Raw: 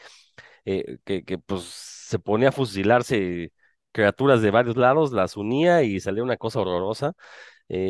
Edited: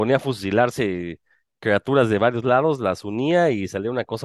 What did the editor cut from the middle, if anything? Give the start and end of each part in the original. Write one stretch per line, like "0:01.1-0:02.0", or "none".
none